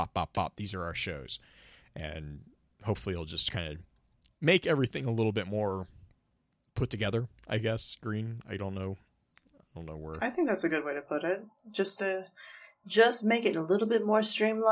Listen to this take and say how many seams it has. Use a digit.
0